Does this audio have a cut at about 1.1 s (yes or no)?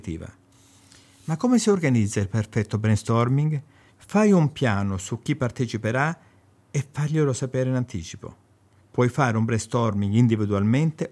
no